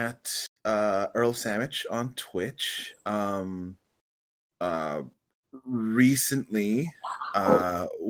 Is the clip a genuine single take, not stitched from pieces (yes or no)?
yes